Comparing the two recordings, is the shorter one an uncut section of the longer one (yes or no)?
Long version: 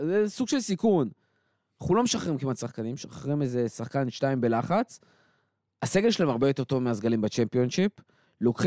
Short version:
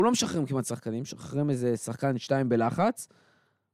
yes